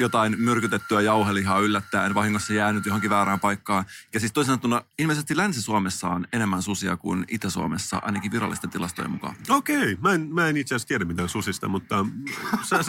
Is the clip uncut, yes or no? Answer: yes